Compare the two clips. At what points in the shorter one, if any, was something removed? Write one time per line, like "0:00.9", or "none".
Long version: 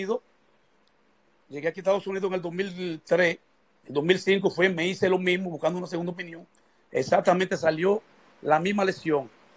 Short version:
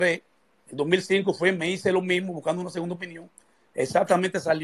none